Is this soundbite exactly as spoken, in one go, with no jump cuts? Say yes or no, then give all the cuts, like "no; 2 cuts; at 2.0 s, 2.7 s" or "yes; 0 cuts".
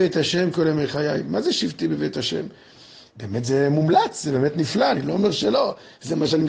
no; 1 cut; at 3.1 s